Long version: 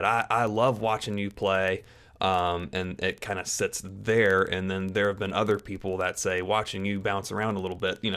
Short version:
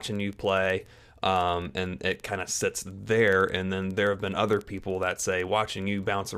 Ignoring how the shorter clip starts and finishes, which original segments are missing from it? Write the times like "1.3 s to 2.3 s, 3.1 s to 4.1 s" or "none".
none